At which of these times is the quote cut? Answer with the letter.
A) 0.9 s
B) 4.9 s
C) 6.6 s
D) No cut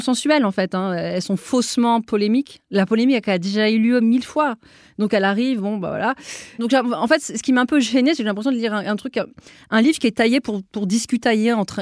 C